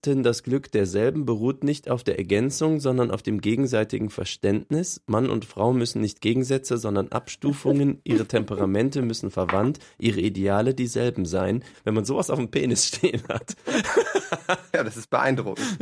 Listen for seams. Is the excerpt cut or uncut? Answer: cut